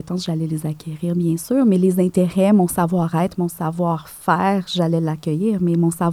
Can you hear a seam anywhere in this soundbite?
no; 0 cuts

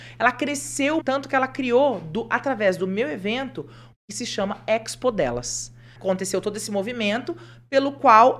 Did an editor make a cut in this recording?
yes; 3 cuts; at 1.0 s, 3.9 s, 6.0 s

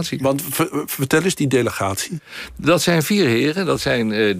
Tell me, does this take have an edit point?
no; 0 cuts

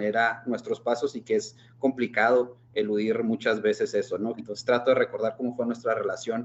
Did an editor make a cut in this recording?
yes; 1 cut; at 4.4 s

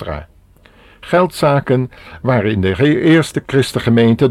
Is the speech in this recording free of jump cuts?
yes; 0 cuts

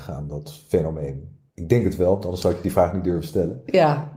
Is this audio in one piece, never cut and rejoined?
yes; 0 cuts

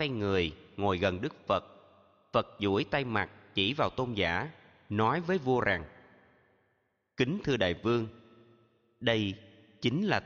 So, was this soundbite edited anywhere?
no; 0 cuts

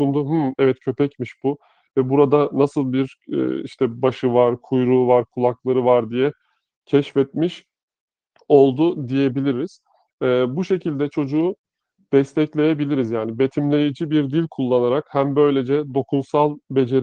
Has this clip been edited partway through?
no; 0 cuts

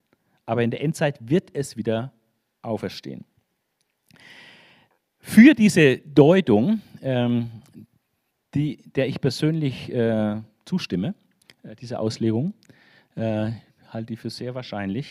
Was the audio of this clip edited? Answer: yes; 1 cut; at 2.6 s

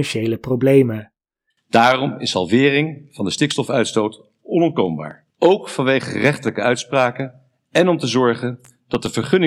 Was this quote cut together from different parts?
yes; 2 cuts; at 1.5 s, 5.3 s

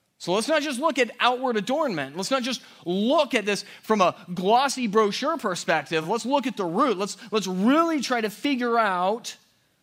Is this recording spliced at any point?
no; 0 cuts

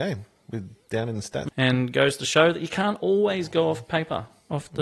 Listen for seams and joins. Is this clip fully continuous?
no; 1 cut; at 1.5 s

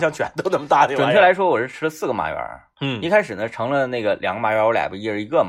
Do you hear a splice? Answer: no; 0 cuts

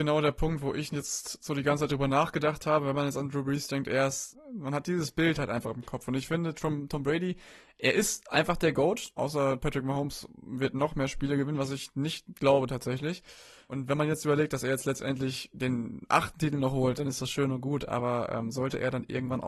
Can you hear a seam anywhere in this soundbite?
yes; 1 cut; at 9.2 s

